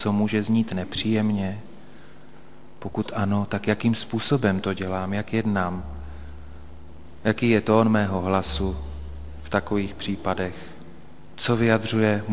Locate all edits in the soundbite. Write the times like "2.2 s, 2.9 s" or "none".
none